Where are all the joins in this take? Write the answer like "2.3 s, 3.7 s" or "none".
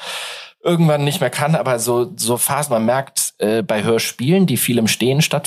none